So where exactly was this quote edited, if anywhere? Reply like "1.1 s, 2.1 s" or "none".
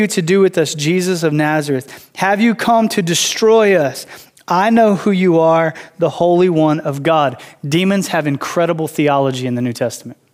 none